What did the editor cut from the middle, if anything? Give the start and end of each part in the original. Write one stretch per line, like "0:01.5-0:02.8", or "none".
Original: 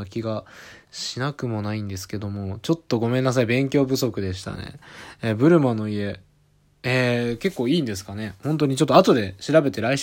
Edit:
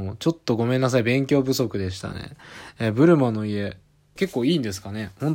0:06.6-0:07.4